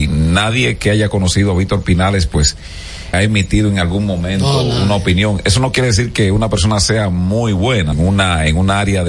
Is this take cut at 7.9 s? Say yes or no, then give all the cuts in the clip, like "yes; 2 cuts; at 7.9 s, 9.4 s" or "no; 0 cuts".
yes; 2 cuts; at 3.1 s, 7.9 s